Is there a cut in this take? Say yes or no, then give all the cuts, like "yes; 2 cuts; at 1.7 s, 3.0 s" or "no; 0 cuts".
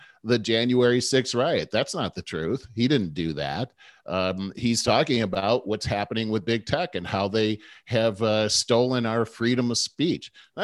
no; 0 cuts